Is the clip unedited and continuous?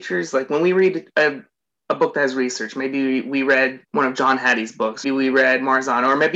no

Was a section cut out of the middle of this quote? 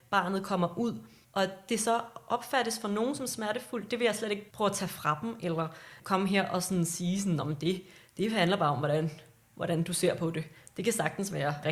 no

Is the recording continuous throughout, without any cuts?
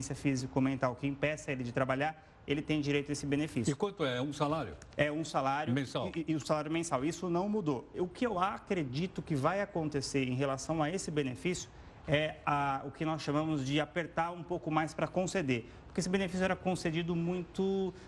yes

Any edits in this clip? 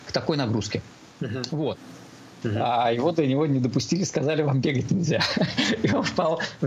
yes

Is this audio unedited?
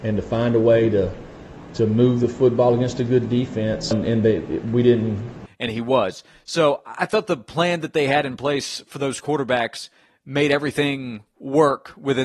no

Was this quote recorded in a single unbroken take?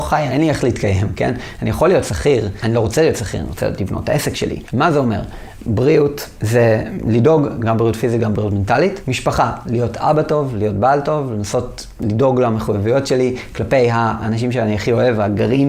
no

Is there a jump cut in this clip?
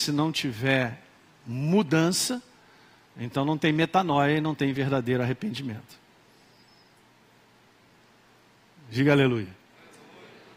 no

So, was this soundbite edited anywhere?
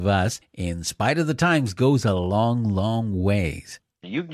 no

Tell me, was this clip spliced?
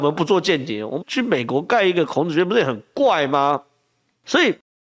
yes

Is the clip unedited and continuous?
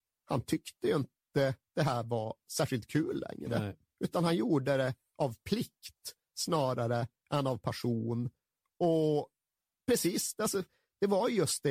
yes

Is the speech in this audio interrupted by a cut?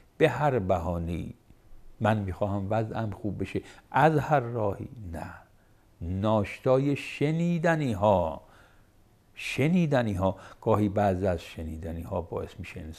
yes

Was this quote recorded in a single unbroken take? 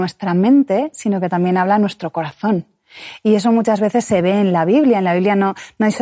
yes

